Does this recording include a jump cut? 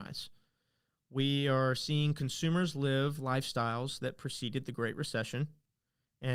no; 0 cuts

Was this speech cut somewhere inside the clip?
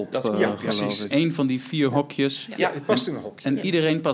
yes; 1 cut; at 1.1 s

